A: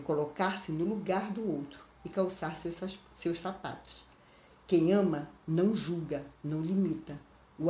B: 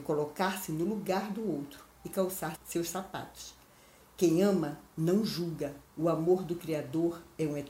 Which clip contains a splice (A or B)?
B